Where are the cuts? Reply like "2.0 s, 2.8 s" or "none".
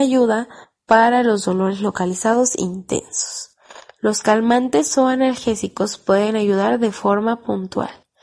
none